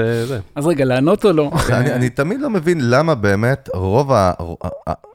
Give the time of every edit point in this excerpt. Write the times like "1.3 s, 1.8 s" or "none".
1.7 s